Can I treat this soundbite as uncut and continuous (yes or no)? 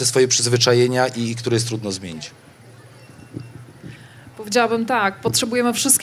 yes